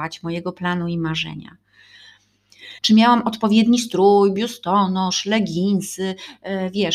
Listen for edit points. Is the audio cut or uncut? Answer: cut